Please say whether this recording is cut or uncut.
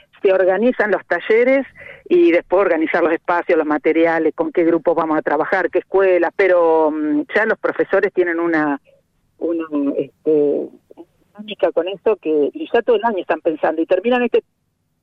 cut